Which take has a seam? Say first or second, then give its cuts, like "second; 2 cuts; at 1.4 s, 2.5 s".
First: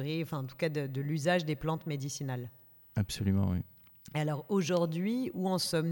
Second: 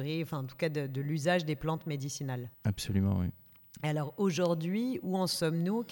second; 1 cut; at 2.5 s